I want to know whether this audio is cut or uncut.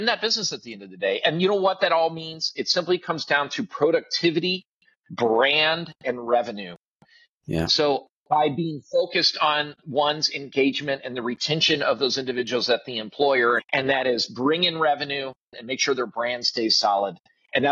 cut